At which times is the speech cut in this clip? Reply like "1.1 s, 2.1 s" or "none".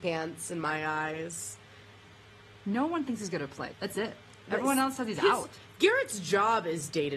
2.5 s, 3.7 s